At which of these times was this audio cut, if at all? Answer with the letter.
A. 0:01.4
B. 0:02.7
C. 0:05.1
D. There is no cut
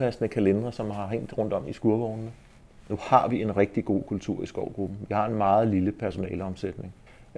D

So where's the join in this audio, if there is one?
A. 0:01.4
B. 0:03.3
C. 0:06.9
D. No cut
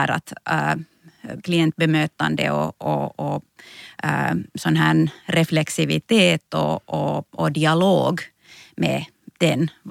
A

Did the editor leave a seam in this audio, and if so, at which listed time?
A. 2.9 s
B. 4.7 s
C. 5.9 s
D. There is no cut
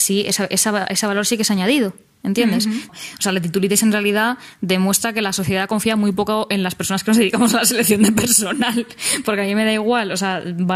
A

